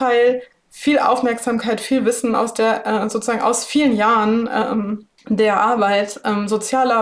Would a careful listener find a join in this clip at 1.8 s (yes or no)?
no